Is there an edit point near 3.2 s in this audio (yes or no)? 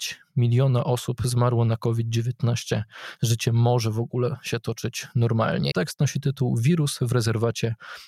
no